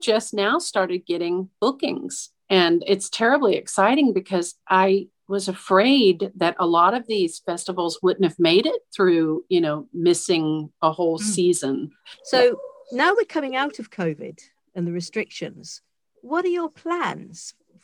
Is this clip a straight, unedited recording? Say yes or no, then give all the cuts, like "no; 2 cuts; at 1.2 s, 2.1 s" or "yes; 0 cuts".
no; 1 cut; at 12.2 s